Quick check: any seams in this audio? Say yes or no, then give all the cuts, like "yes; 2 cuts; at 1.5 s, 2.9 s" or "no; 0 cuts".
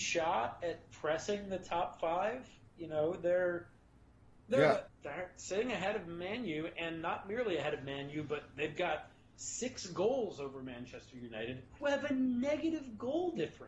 yes; 1 cut; at 4.9 s